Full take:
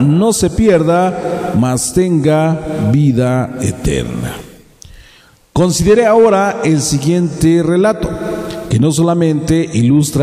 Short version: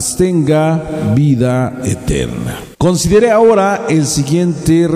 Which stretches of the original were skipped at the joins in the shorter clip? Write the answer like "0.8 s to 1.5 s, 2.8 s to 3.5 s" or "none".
4.5 s to 5.5 s

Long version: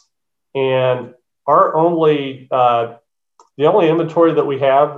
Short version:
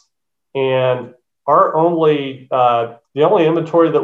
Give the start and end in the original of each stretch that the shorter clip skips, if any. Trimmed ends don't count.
3.0 s to 3.5 s

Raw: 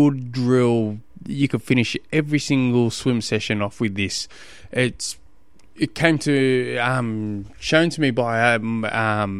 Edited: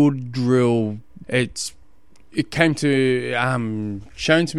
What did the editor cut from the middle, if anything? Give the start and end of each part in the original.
1.2 s to 4.7 s

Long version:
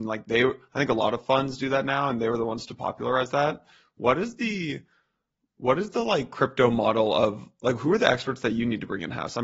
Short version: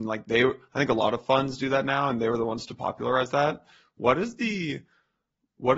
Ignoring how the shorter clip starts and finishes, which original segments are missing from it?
none

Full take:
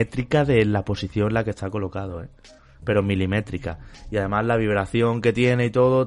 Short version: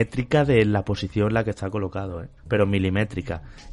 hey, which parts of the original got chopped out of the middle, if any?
2.4 s to 2.7 s

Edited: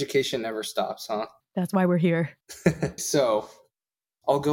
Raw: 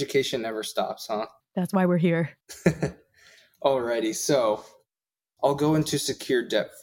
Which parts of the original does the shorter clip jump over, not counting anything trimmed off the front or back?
3.0 s to 4.1 s

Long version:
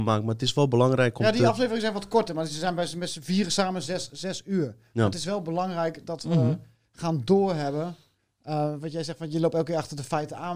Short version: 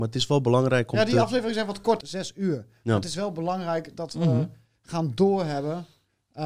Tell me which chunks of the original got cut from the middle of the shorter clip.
2.3 s to 4.1 s

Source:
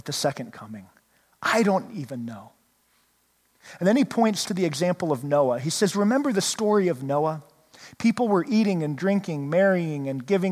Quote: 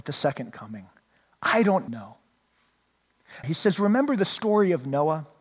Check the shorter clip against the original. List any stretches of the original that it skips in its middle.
1.9 s to 2.2 s, 3.8 s to 5.6 s

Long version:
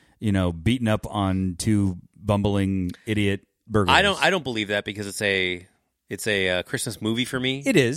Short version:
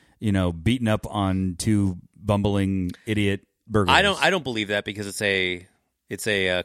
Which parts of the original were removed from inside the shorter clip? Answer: none

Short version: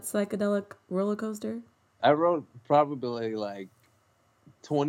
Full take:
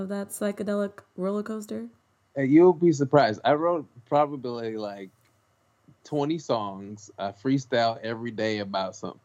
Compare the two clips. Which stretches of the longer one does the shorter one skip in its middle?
2.3 s to 3.4 s

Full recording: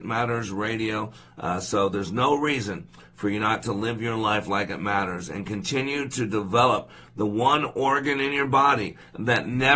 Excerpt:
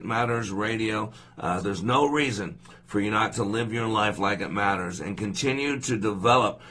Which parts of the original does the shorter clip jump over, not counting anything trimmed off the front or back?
1.6 s to 1.9 s

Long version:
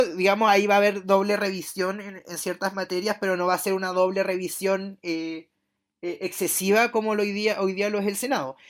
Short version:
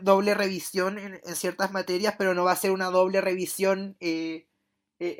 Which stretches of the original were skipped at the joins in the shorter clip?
none

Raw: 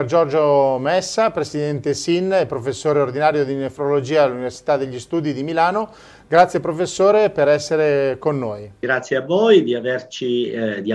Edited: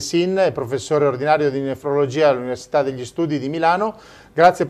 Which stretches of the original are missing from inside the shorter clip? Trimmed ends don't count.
none

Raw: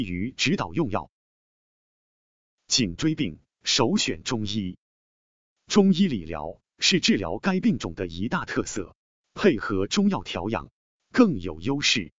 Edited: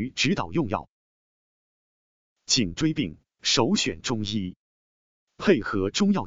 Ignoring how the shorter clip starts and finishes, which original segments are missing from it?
5.4 s to 9.2 s

